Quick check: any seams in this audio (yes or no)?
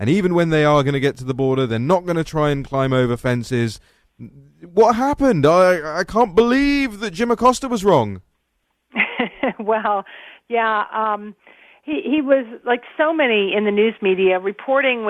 no